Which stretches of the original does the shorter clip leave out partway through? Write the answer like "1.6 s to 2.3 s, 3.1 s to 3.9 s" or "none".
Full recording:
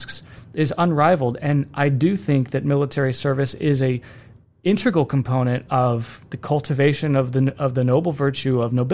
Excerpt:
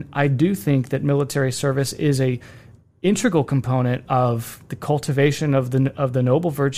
none